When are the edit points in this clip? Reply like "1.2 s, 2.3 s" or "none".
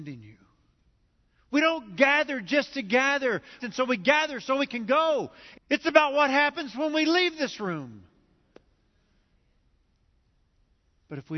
3.6 s, 5.5 s